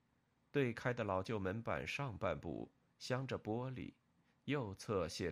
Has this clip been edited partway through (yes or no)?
yes